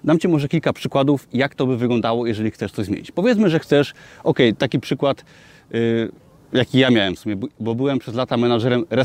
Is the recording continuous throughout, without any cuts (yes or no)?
yes